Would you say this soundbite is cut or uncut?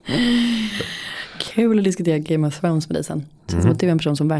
uncut